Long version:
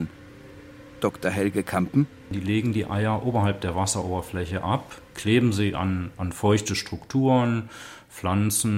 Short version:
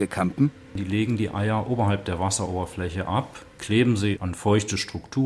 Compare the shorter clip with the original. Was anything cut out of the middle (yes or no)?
yes